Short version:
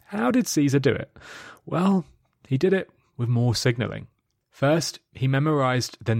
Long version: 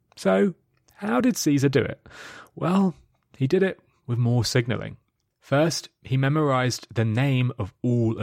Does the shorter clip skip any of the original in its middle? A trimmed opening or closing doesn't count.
no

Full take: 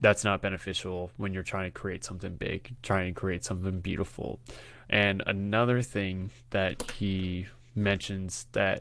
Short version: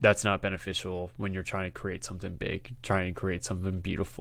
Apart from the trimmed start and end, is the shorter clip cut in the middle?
no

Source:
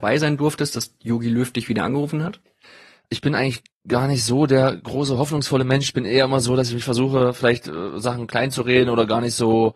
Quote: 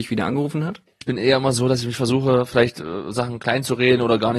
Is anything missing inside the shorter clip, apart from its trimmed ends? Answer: yes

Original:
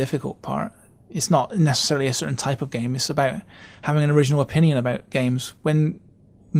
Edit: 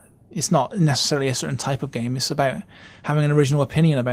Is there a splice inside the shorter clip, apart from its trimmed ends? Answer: no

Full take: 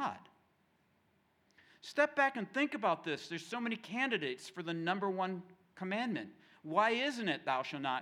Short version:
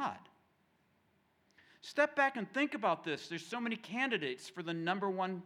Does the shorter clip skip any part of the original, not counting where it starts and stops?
no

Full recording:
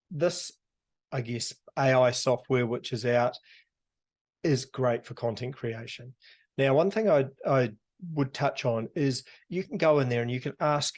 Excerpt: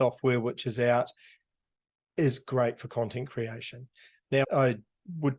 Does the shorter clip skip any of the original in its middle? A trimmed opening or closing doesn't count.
yes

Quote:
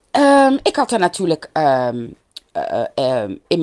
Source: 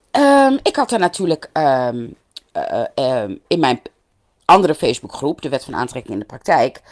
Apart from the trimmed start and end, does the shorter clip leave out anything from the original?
no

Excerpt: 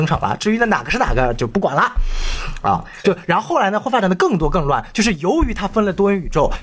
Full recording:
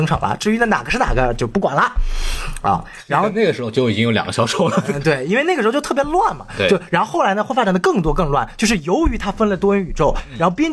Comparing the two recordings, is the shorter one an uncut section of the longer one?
no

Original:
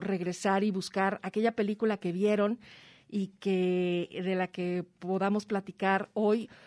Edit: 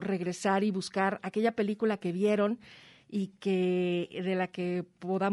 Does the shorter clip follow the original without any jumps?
yes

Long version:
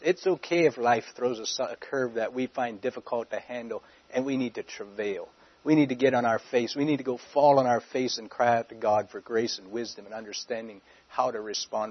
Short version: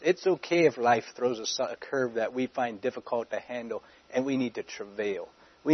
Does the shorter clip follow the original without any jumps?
yes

